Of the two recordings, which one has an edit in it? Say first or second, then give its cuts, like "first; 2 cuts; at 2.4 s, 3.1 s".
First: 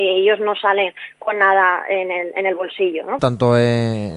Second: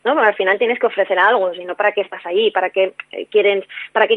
first; 1 cut; at 3.2 s